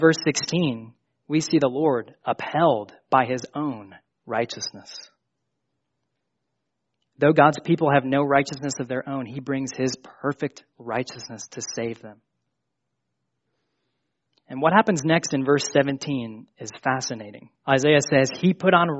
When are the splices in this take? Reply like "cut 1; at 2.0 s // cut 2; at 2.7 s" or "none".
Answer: cut 1; at 17.5 s